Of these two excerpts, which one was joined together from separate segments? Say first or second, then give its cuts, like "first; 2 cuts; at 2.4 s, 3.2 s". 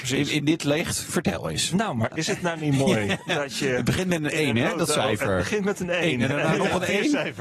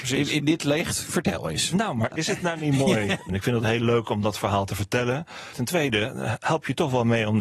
second; 2 cuts; at 3.3 s, 5.5 s